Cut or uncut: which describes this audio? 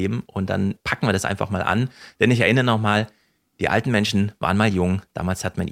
uncut